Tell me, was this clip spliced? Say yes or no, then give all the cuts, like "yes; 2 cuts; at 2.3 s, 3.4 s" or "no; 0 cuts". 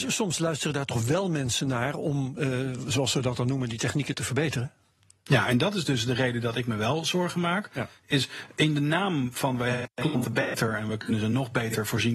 no; 0 cuts